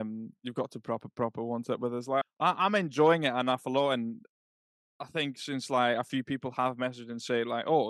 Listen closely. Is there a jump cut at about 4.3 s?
no; 1 cut; at 2.2 s

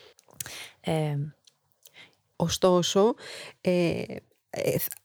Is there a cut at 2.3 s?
yes; 1 cut; at 2.3 s

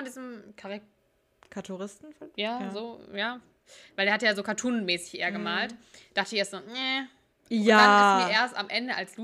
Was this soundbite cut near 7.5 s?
yes; 1 cut; at 7.5 s

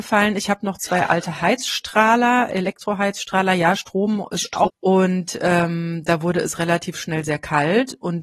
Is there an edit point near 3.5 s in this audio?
no; 1 cut; at 4.7 s

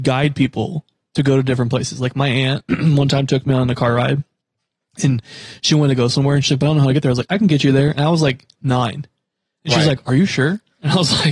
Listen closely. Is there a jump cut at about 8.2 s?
no; 0 cuts

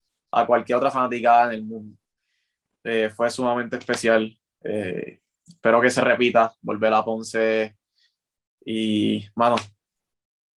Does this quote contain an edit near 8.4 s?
no; 0 cuts

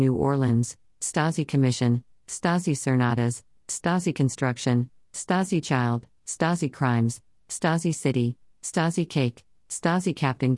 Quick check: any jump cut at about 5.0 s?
no; 1 cut; at 3.6 s

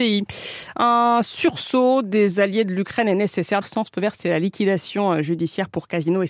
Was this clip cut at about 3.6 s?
yes; 1 cut; at 3.6 s

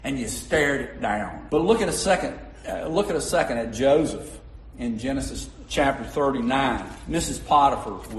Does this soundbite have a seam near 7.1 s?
no; 1 cut; at 1.5 s

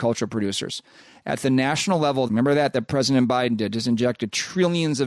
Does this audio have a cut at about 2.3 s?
yes; 1 cut; at 2.3 s

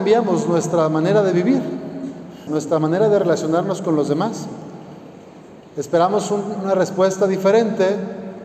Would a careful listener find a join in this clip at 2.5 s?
yes; 1 cut; at 2.5 s

